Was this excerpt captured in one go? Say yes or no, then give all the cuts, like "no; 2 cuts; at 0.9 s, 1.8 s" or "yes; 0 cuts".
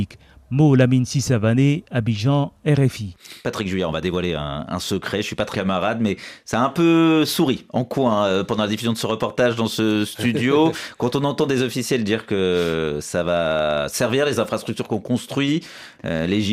no; 1 cut; at 5.5 s